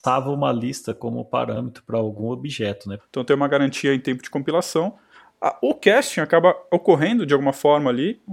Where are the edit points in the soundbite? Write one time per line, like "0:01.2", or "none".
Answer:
0:03.0